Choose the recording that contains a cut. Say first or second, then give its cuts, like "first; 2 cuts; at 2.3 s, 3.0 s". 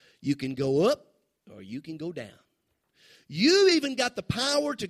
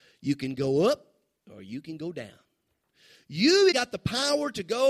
second; 1 cut; at 3.7 s